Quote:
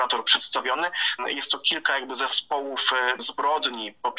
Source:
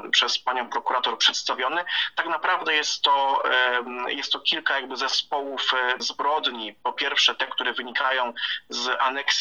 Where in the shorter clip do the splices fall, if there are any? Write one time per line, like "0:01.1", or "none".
0:01.2